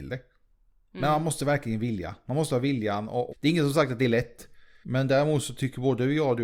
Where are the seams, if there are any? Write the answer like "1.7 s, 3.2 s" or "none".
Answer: 3.3 s, 4.8 s